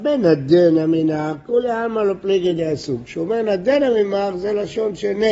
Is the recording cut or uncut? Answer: uncut